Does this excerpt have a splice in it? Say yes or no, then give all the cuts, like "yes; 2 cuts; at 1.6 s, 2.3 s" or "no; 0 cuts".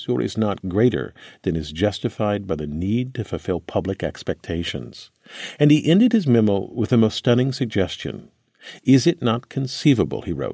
no; 0 cuts